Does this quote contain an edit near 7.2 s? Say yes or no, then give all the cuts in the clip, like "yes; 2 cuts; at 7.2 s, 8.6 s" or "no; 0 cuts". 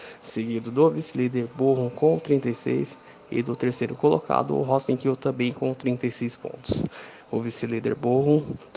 yes; 1 cut; at 7.2 s